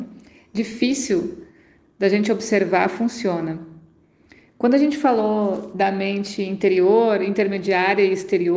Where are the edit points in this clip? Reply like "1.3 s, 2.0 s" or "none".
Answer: none

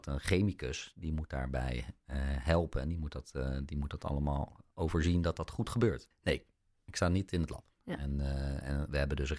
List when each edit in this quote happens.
6.1 s, 7.8 s

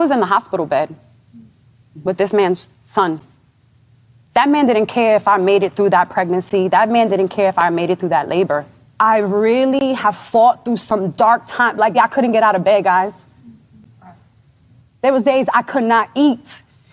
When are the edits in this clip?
11.9 s

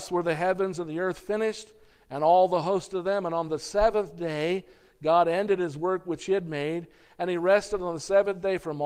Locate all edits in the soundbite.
none

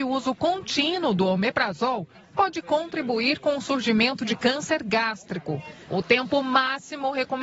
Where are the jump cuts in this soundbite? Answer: 5.9 s

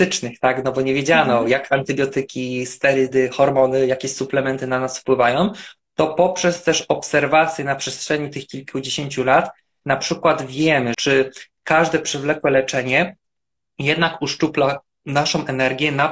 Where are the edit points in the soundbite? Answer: 10.9 s

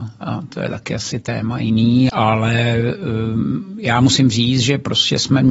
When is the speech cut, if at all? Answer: 2.1 s

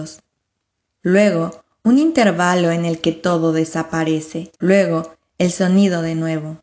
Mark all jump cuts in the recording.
4.6 s

